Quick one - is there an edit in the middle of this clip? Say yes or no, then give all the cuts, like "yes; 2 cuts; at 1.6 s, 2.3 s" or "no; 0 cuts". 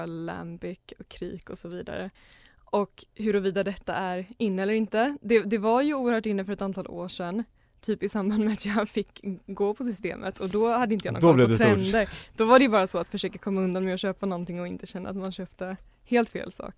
no; 0 cuts